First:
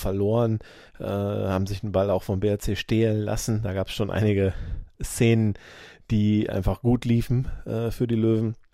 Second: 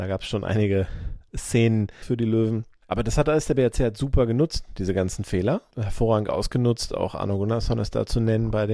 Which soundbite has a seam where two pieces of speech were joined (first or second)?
second